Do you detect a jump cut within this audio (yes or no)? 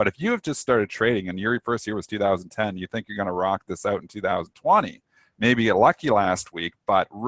no